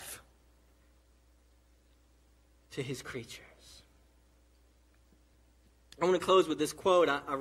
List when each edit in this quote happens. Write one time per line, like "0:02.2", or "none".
none